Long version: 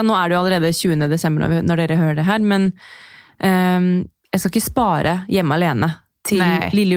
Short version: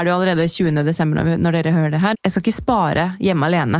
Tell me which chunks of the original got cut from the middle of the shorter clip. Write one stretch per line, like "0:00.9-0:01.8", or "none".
0:02.4-0:04.2